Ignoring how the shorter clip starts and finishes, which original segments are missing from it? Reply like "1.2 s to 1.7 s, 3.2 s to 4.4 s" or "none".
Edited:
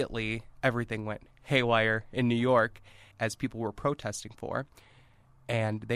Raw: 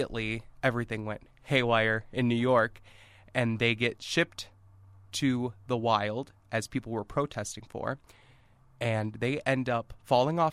3.1 s to 6.4 s

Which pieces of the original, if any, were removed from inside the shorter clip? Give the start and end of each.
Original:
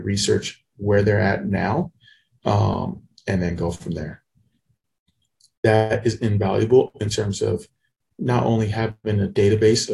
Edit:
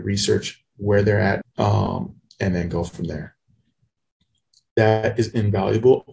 1.4 s to 2.3 s

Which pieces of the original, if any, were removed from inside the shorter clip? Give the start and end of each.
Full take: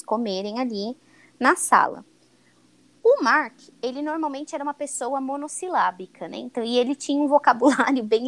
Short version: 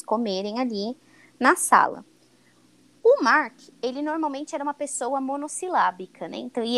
none

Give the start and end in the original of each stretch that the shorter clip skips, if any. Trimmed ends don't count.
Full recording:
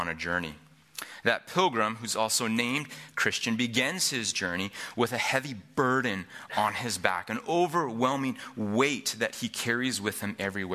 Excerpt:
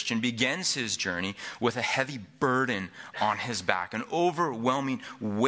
none

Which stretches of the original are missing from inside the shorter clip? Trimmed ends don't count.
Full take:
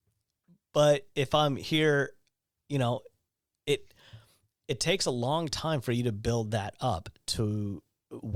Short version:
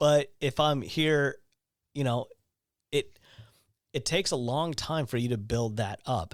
none

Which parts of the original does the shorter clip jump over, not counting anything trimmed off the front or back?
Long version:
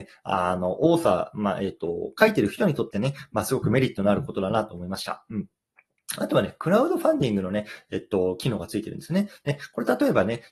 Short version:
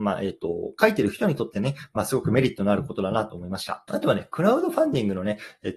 5.3 s to 6.2 s

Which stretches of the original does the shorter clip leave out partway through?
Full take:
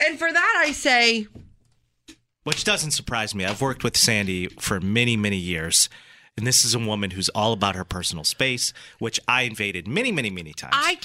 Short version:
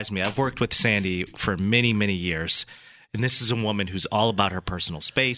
none

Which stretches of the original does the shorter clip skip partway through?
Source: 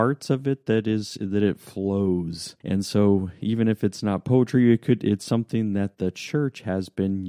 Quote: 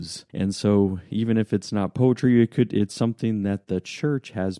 none

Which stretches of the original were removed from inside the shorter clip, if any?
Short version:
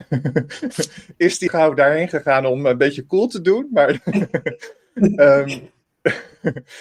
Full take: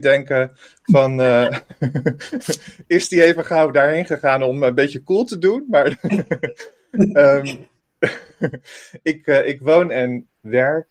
3.2 s to 3.4 s

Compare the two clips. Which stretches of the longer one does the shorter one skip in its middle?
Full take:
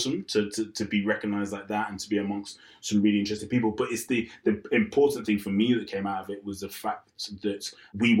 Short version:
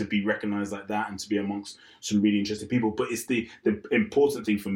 none

